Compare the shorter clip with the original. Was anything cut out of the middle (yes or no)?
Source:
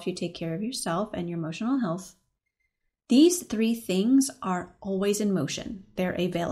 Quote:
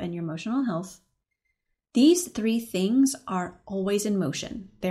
no